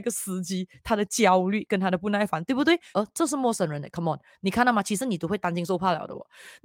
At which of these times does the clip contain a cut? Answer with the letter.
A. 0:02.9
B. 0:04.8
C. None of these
A